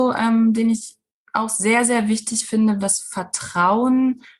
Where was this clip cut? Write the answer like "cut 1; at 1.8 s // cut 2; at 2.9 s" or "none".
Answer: cut 1; at 2.8 s